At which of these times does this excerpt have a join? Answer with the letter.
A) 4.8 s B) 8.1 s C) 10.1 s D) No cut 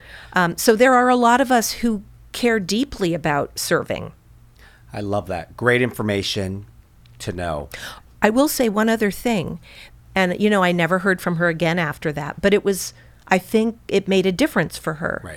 C